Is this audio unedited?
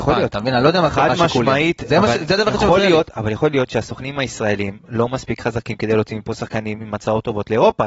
yes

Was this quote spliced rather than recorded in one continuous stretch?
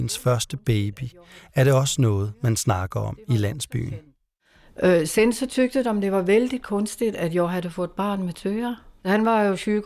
no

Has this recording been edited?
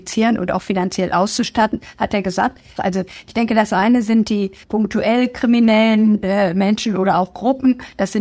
yes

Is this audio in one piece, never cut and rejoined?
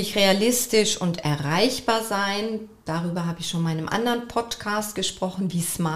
yes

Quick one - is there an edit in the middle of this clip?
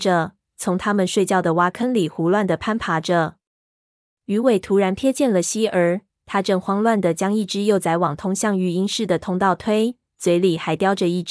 no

